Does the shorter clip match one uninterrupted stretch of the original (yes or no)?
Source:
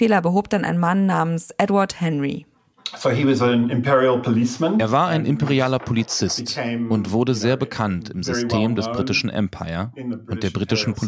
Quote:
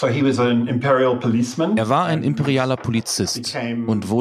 yes